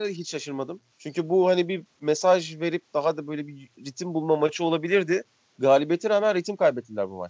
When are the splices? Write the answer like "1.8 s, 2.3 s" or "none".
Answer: 0.9 s

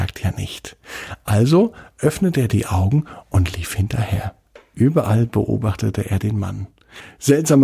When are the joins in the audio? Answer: none

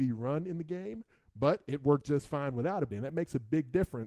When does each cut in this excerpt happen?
2.9 s

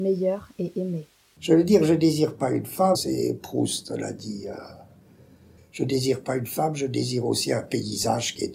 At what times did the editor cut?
1.3 s, 2.9 s, 5.6 s

